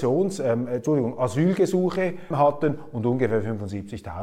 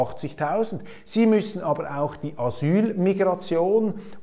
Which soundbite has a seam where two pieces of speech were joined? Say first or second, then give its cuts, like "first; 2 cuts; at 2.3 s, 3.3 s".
first; 1 cut; at 2.3 s